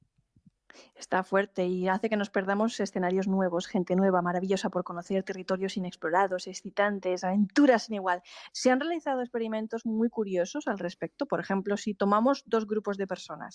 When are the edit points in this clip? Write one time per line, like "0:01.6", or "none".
0:08.5